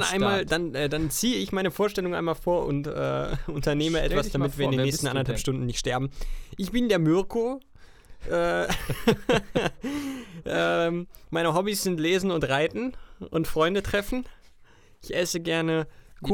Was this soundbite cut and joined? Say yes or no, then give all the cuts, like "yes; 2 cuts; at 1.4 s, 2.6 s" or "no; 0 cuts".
no; 0 cuts